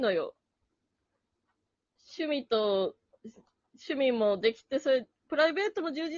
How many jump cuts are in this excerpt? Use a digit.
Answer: 1